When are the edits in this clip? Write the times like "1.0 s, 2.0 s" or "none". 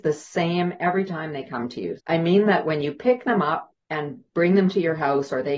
2.0 s, 3.8 s

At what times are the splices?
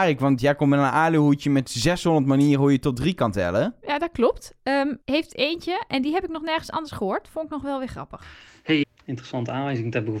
5.0 s, 8.8 s

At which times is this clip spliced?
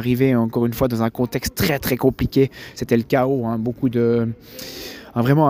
none

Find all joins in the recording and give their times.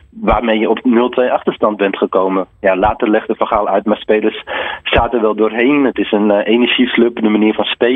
none

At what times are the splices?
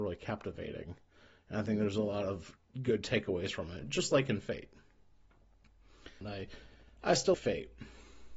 6.2 s, 7.3 s

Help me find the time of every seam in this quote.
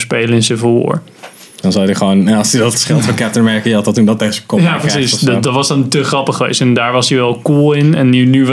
1.6 s

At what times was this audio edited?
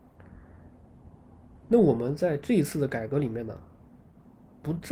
none

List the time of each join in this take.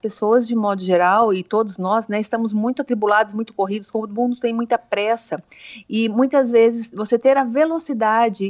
none

